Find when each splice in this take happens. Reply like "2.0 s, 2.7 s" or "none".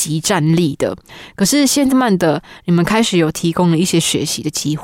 1.9 s